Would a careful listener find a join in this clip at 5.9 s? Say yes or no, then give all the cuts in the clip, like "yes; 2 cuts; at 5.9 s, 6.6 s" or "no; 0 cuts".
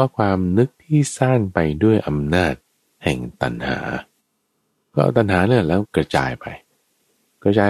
yes; 1 cut; at 5.9 s